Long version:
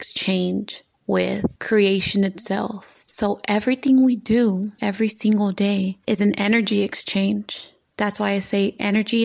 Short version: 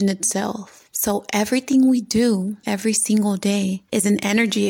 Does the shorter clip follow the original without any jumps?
yes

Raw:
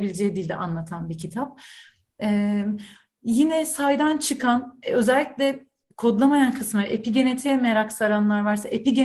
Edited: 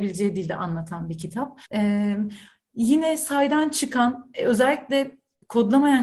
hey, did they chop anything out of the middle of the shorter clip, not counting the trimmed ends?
yes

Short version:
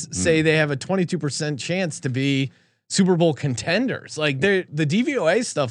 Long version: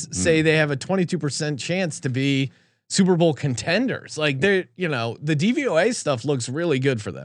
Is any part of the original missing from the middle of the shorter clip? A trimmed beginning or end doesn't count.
yes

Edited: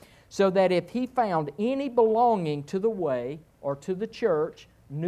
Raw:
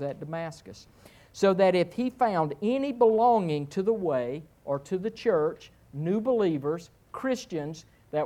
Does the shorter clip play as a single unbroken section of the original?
yes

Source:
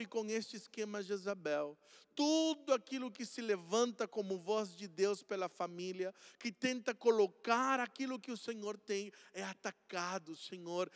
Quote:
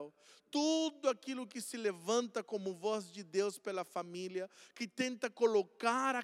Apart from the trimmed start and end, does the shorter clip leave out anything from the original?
no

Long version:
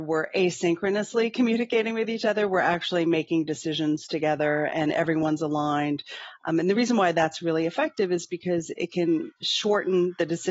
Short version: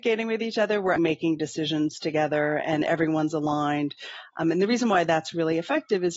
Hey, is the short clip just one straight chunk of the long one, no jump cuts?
no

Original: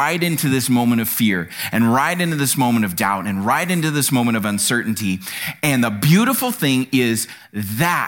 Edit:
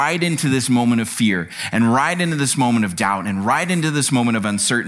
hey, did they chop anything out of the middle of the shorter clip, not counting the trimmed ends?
no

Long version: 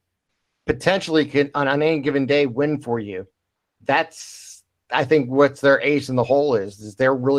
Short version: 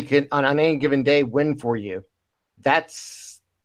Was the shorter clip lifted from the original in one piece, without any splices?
yes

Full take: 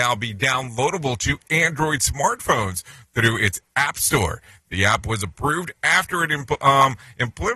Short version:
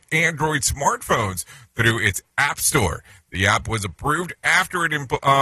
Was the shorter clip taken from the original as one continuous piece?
yes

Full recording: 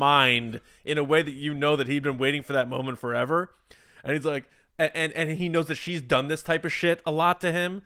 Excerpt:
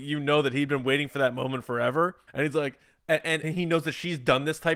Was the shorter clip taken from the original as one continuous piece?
no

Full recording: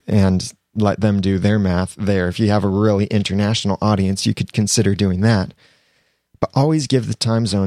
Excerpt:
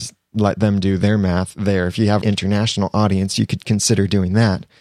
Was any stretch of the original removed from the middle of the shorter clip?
yes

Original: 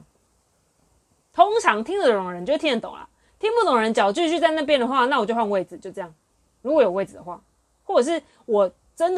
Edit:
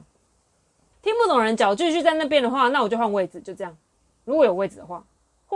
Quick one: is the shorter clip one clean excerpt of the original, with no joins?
no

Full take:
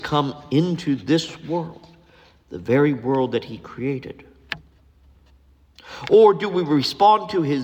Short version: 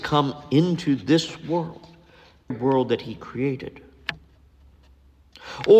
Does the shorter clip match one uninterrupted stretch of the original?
no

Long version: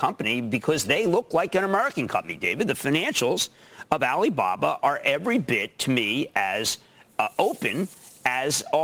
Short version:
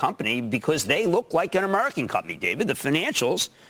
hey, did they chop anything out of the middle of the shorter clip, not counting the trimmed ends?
no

